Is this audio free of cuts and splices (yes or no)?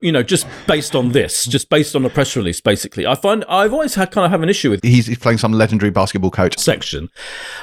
no